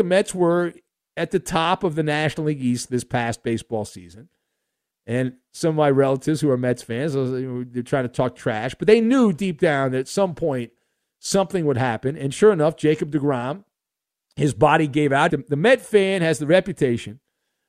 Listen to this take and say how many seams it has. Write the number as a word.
one